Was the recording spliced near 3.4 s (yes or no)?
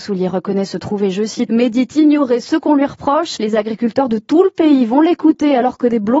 yes